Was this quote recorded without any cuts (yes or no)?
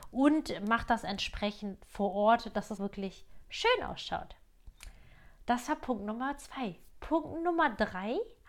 no